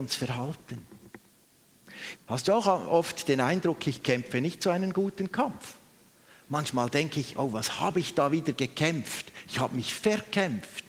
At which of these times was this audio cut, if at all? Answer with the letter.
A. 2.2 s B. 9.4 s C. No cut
A